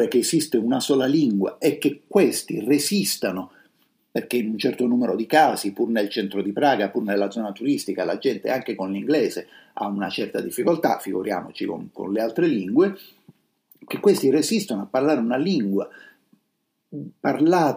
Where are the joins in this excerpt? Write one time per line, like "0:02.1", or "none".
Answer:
none

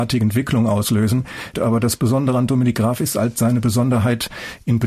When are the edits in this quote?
0:01.5

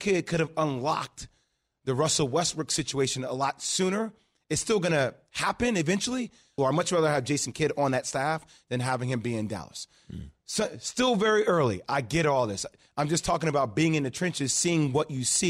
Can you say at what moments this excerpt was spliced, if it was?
0:06.6

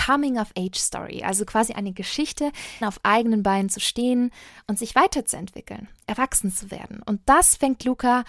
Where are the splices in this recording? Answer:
0:02.8

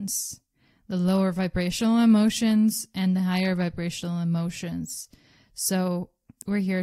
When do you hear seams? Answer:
none

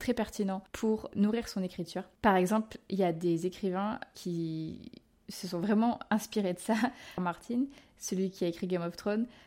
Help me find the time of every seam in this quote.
0:07.2

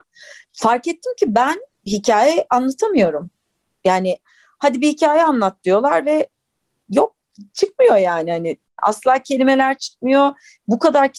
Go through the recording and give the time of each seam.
0:01.7

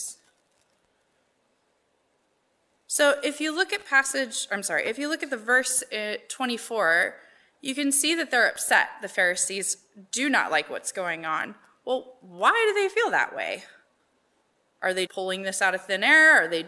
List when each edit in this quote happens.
0:15.1

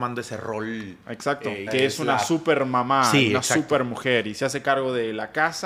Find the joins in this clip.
0:01.7

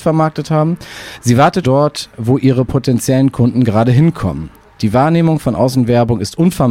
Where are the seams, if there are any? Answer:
0:01.6
0:04.8

